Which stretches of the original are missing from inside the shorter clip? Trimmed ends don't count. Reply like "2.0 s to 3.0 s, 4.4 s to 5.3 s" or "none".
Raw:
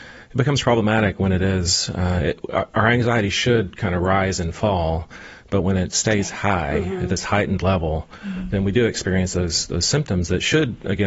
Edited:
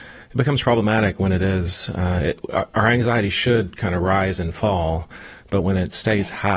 none